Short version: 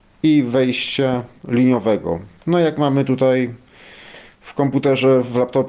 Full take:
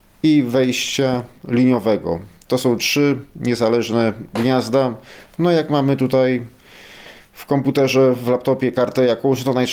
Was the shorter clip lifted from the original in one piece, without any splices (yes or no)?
no